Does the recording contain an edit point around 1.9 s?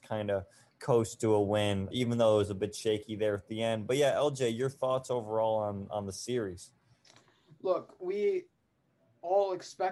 yes; 1 cut; at 1.9 s

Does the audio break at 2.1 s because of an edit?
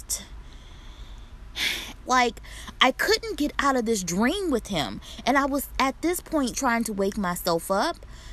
yes; 2 cuts; at 2.1 s, 6.5 s

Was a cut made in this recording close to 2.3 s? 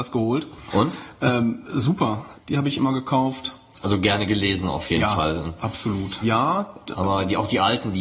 yes; 2 cuts; at 2.3 s, 6.2 s

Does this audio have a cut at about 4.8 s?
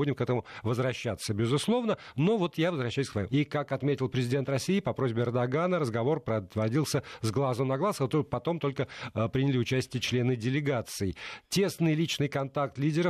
no; 1 cut; at 3.3 s

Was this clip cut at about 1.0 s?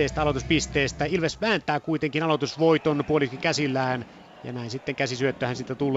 no; 0 cuts

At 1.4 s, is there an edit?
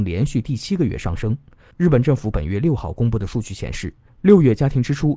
no; 0 cuts

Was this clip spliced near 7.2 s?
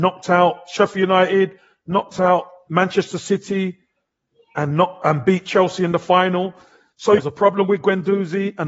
yes; 2 cuts; at 2.7 s, 7.2 s

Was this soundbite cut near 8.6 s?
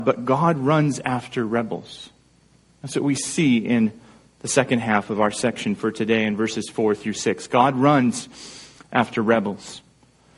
no; 0 cuts

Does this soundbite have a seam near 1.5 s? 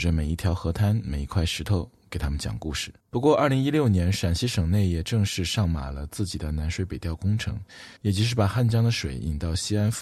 no; 2 cuts; at 3.0 s, 8.0 s

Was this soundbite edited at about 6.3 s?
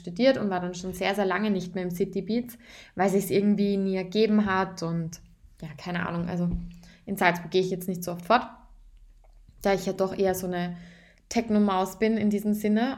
no; 0 cuts

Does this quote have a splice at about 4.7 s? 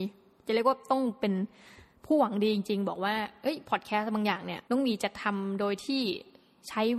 yes; 1 cut; at 4.7 s

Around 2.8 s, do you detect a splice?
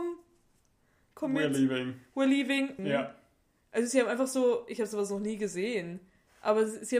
yes; 1 cut; at 2.8 s

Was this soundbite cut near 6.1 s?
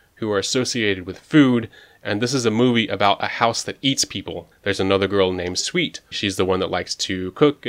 yes; 2 cuts; at 4.5 s, 6.1 s

